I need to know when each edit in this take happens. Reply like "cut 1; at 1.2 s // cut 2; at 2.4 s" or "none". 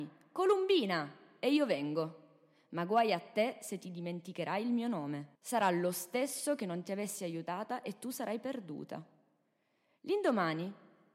cut 1; at 5.4 s